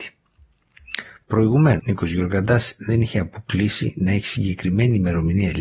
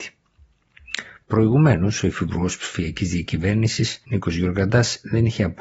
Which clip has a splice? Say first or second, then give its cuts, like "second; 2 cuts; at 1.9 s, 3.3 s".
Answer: first; 1 cut; at 1.8 s